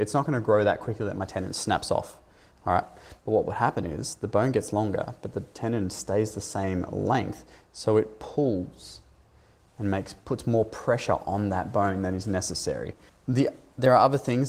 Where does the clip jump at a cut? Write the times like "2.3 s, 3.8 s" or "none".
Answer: 13.1 s